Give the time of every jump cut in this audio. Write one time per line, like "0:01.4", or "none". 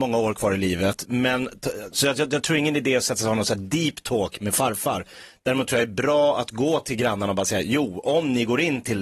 none